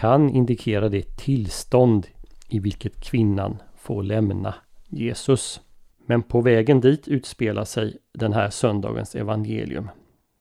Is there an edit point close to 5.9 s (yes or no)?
yes